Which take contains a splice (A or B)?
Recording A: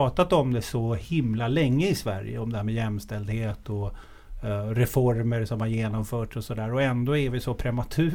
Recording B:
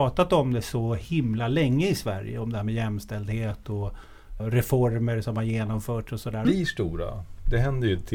B